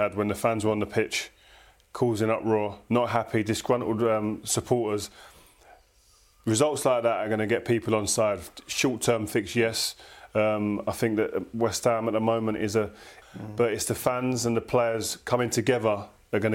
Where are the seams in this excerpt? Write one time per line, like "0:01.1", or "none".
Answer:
0:13.2